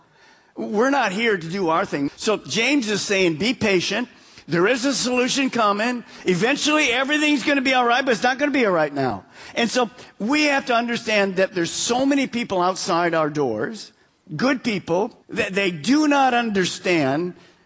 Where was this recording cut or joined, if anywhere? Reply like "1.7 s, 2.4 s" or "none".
2.1 s, 15.2 s